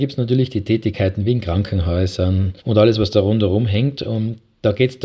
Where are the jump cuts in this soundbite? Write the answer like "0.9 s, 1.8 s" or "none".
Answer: 2.6 s